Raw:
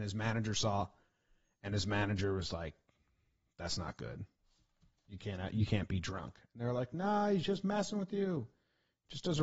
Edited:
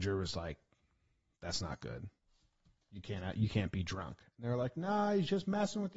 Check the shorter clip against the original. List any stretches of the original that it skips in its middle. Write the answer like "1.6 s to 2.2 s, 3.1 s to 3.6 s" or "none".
none